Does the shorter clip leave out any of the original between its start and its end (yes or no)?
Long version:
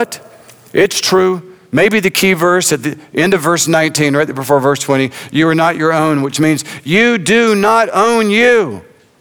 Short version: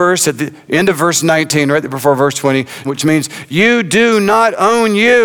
yes